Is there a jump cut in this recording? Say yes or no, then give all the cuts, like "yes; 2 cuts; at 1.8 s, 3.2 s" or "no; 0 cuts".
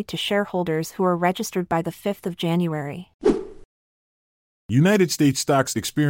no; 0 cuts